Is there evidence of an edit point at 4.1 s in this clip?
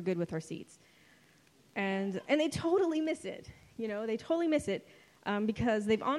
no; 1 cut; at 2.2 s

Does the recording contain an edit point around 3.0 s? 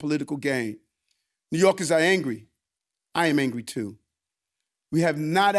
no; 0 cuts

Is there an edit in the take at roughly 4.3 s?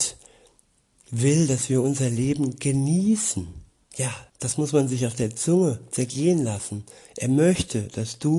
yes; 1 cut; at 4.3 s

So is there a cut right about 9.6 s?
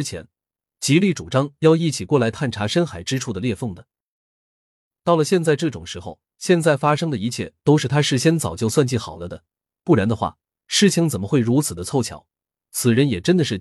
no; 1 cut; at 6.3 s

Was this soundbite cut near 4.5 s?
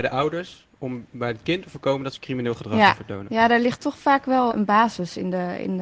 yes; 1 cut; at 4.5 s

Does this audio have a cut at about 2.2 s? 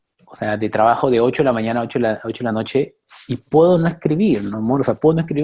no; 0 cuts

